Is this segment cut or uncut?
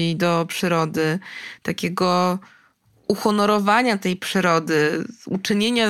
uncut